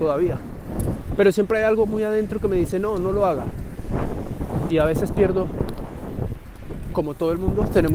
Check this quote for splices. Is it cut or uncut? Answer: cut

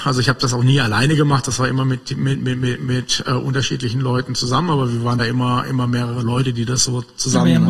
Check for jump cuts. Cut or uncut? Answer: uncut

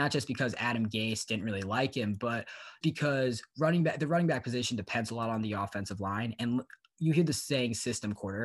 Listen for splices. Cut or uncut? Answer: cut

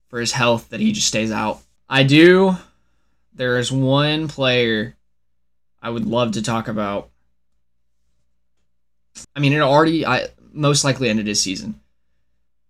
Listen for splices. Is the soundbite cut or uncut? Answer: cut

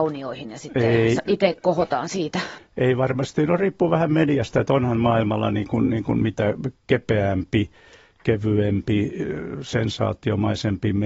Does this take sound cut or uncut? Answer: cut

